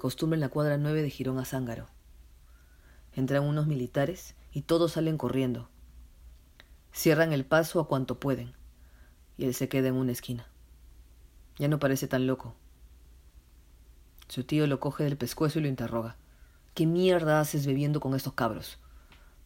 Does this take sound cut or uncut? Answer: uncut